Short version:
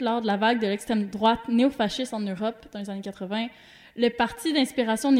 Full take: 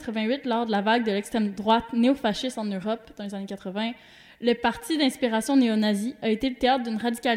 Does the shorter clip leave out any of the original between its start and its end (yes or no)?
no